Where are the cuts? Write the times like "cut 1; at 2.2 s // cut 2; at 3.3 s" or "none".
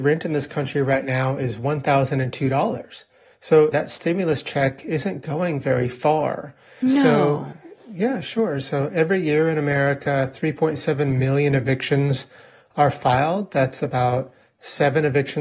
cut 1; at 3.7 s // cut 2; at 6.8 s